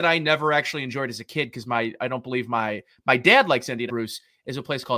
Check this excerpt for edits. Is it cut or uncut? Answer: cut